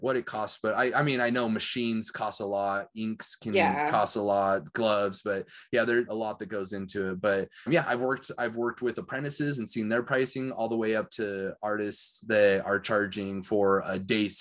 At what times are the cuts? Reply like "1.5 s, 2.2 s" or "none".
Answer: 6.1 s, 7.7 s